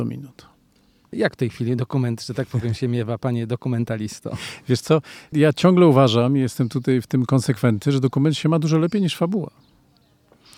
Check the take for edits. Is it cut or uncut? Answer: cut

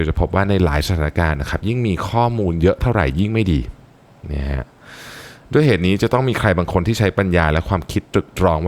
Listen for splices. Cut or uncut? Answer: uncut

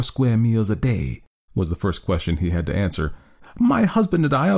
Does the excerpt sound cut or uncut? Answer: cut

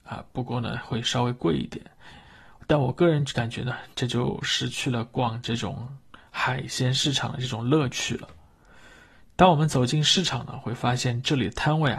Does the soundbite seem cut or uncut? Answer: uncut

